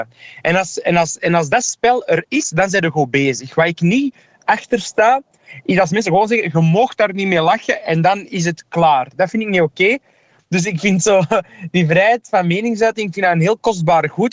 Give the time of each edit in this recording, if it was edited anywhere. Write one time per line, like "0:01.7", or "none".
none